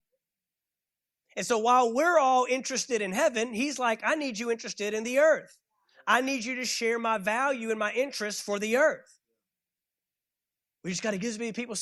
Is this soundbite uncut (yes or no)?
yes